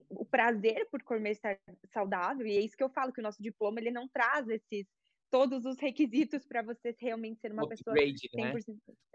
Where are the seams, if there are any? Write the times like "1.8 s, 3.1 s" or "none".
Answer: none